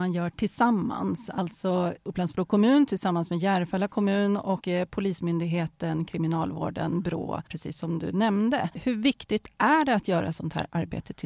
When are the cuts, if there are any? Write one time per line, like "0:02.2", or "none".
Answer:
none